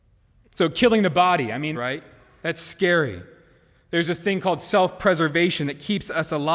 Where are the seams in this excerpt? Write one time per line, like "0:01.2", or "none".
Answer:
0:01.7